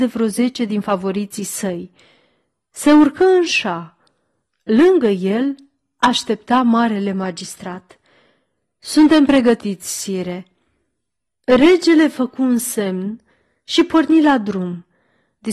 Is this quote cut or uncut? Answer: uncut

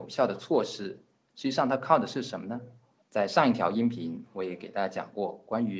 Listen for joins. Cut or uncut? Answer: cut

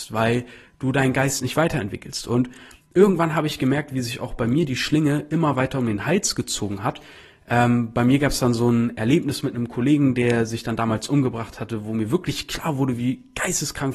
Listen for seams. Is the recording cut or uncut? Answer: uncut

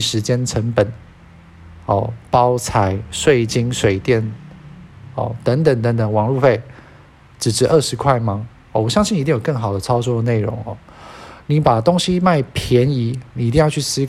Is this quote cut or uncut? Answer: uncut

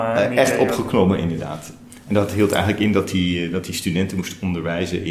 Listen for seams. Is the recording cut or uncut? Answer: uncut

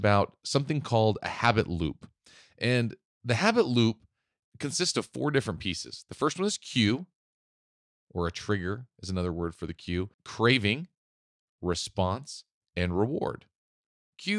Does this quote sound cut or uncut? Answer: cut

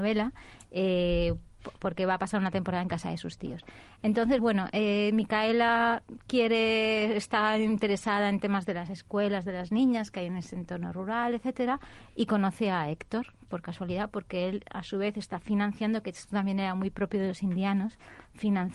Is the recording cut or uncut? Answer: uncut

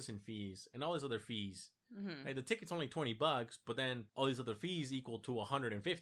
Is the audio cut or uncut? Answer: cut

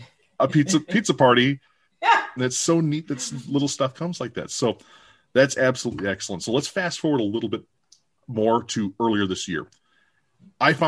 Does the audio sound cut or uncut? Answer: cut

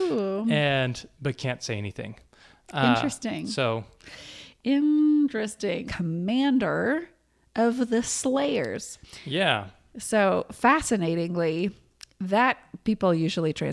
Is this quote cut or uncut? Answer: cut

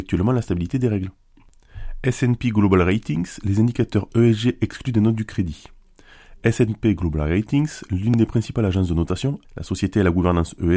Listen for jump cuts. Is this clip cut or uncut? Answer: cut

